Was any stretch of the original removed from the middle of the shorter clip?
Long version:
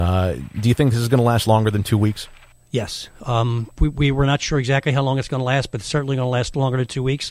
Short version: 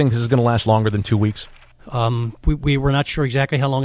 yes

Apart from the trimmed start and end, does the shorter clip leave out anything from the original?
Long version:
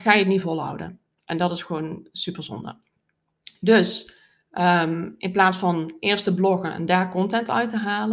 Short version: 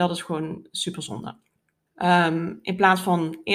yes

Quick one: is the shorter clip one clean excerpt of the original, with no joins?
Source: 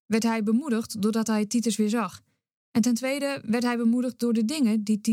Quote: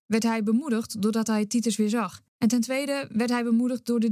no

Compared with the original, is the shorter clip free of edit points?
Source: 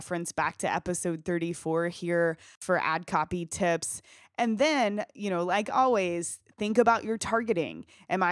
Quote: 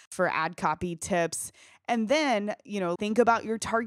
no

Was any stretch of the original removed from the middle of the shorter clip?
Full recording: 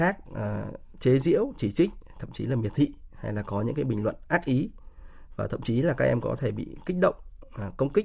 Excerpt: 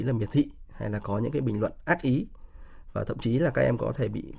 no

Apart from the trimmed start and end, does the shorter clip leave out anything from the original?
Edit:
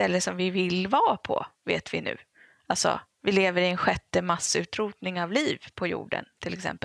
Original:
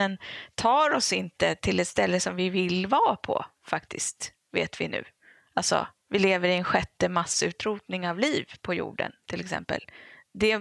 yes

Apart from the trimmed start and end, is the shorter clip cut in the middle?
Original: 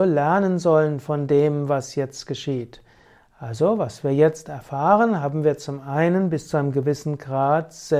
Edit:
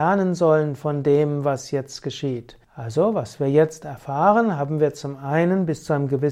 yes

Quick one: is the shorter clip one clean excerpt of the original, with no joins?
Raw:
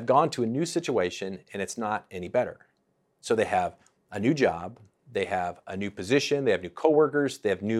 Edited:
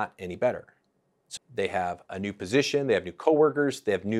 no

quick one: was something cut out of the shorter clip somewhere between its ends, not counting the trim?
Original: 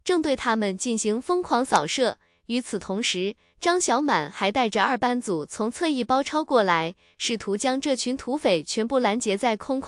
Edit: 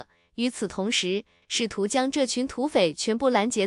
yes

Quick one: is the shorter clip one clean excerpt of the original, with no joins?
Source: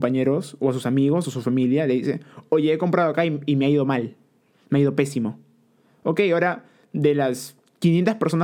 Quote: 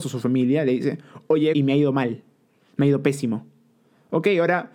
no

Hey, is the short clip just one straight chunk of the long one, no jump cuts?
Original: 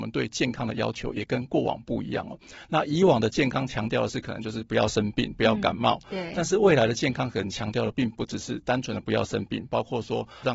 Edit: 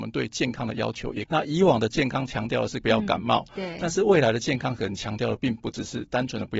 no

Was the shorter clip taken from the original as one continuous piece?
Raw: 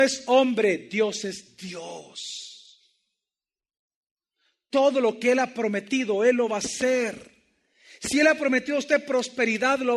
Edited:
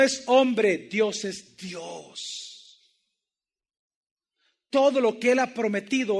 yes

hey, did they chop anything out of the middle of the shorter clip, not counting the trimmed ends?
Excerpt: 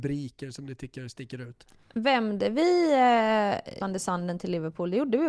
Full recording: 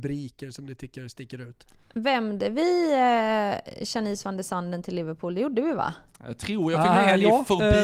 yes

